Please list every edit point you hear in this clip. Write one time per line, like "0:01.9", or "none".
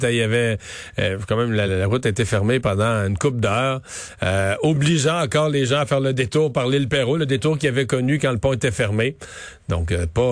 0:01.7